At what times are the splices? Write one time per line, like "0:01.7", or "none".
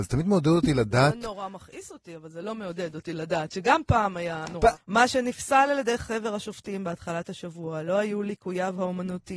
0:04.7